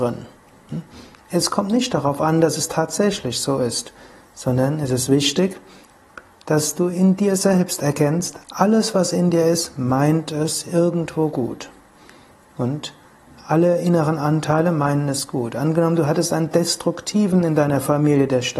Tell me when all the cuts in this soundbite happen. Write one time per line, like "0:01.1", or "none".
0:01.1